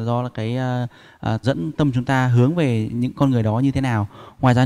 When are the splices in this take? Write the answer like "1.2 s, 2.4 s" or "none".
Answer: 1.4 s